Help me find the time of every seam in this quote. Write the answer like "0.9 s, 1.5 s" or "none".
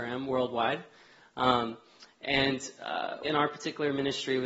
3.2 s